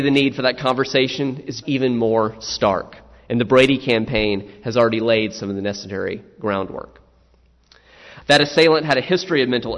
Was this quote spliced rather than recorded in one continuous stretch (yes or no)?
yes